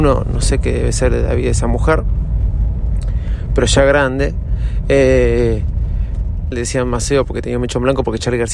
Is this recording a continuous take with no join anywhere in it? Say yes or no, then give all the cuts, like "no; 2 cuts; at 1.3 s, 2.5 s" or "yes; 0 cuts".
no; 1 cut; at 6.5 s